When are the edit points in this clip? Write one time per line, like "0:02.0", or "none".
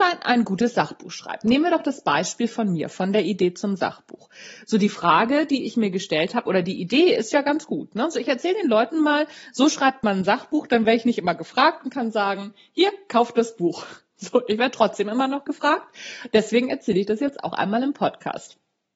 none